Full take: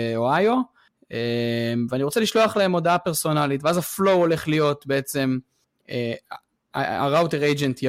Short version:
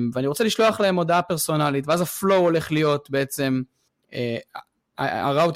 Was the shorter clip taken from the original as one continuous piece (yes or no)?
yes